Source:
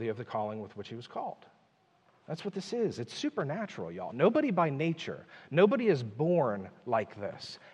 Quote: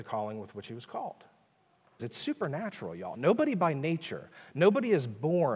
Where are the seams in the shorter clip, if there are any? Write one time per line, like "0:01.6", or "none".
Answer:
0:02.0